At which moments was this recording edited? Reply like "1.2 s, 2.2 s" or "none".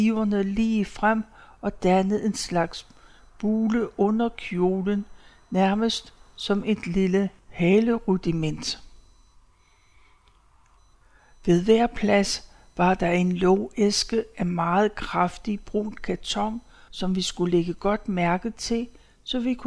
16.9 s